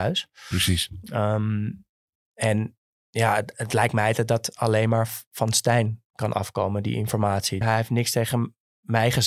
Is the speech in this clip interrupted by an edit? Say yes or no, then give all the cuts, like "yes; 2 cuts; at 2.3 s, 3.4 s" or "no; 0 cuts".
yes; 2 cuts; at 3.5 s, 7.6 s